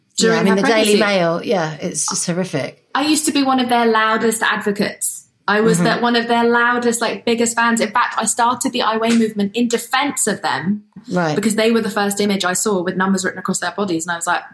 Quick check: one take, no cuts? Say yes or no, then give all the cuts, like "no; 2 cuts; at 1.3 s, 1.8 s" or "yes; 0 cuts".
yes; 0 cuts